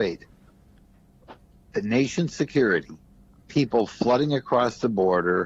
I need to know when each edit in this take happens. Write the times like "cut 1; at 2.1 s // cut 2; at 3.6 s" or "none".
none